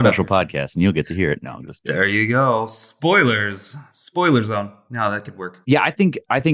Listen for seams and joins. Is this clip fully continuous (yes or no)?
no